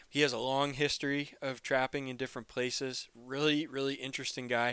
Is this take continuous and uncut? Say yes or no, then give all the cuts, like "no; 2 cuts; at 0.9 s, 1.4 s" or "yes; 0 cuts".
yes; 0 cuts